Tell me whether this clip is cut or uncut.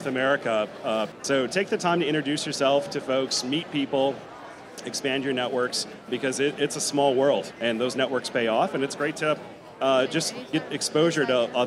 cut